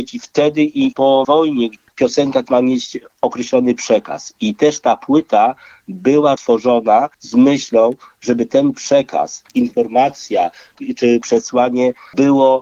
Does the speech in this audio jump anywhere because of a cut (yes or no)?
yes